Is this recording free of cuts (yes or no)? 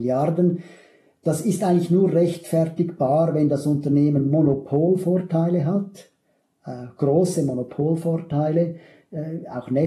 yes